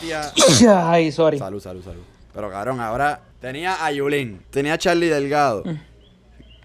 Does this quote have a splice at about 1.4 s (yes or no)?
no